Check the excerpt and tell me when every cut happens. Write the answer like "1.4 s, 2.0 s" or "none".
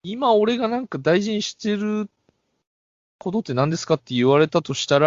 none